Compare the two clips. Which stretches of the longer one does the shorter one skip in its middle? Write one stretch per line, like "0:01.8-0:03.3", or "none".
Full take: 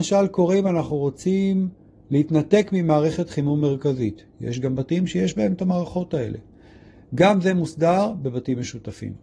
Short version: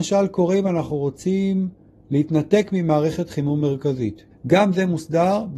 0:04.3-0:07.0